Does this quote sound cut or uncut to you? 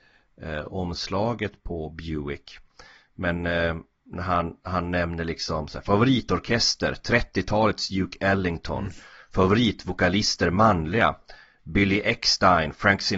uncut